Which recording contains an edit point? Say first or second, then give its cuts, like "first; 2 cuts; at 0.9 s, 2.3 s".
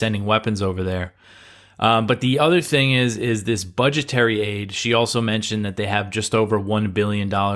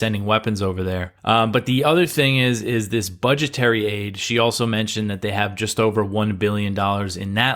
second; 1 cut; at 1.2 s